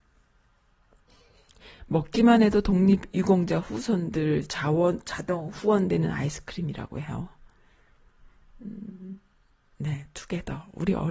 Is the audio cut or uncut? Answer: cut